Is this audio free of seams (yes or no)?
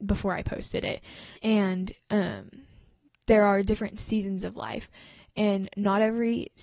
no